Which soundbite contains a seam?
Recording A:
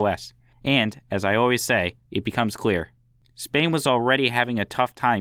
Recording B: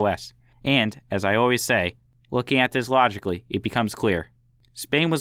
A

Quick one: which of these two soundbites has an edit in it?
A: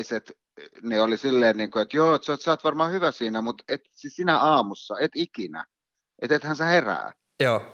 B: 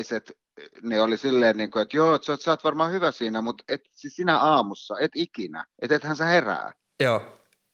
B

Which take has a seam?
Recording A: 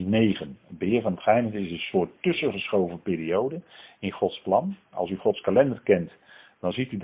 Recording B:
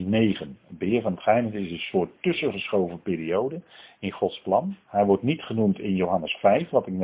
B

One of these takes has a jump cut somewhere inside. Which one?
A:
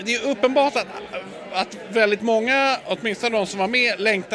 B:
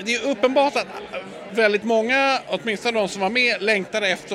B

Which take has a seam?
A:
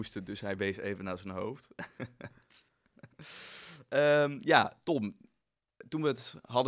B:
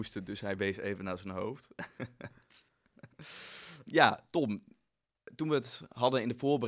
B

